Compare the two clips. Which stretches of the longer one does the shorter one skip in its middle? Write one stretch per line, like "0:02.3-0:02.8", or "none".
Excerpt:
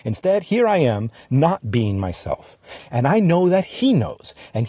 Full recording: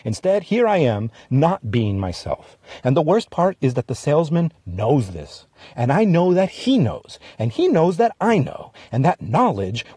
0:02.8-0:05.6